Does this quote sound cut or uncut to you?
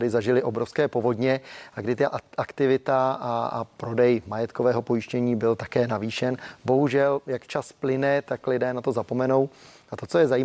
uncut